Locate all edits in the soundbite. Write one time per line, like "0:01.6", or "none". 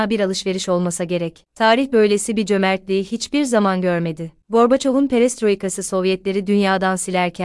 0:01.5
0:04.4